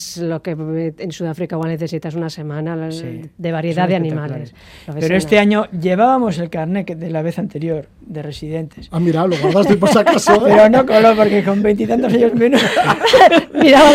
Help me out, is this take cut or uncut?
uncut